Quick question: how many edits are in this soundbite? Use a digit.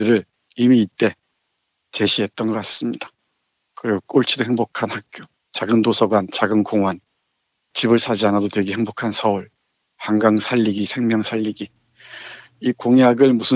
2